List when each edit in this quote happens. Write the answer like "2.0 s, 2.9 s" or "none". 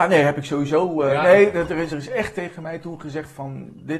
1.9 s